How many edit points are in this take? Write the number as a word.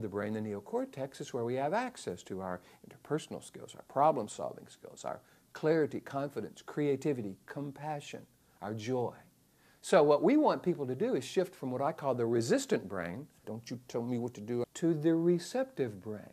two